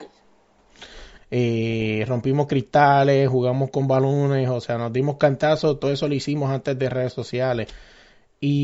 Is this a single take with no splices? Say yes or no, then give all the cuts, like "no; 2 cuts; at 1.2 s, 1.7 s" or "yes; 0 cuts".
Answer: no; 1 cut; at 1.2 s